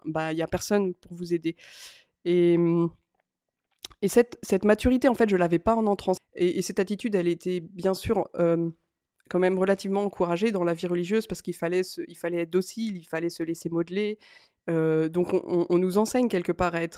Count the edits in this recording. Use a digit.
1